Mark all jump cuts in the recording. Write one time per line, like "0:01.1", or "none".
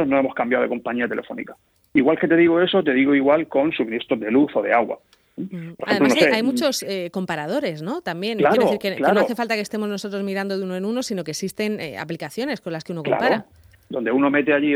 0:01.9